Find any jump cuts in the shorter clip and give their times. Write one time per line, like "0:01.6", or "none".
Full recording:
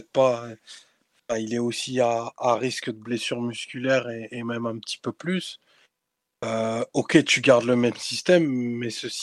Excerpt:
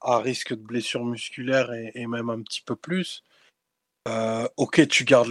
none